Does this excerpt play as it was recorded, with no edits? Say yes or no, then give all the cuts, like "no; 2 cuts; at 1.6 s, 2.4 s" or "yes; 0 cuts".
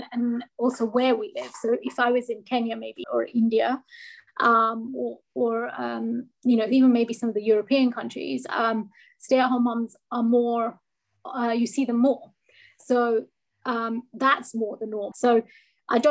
no; 2 cuts; at 3.0 s, 15.1 s